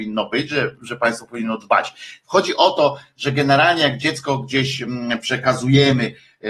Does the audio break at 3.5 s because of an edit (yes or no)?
no